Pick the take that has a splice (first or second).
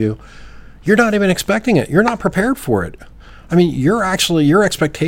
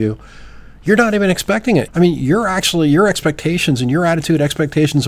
second